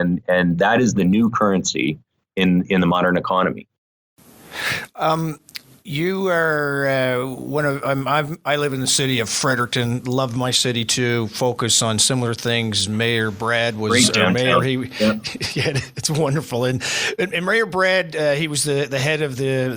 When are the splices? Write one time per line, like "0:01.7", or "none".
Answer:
none